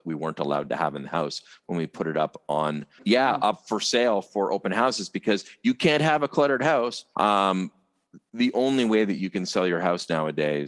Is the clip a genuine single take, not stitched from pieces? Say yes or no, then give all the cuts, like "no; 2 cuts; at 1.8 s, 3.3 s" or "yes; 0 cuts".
no; 2 cuts; at 3.0 s, 7.1 s